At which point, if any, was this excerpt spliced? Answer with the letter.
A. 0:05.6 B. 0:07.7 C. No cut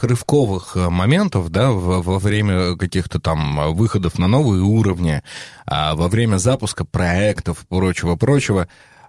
C